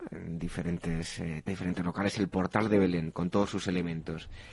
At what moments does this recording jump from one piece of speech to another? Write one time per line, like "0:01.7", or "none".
0:01.5